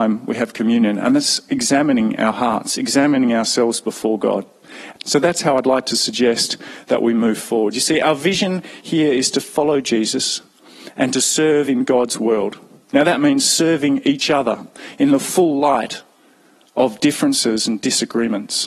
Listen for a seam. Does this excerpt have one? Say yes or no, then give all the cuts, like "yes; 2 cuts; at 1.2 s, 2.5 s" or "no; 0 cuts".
yes; 1 cut; at 4.9 s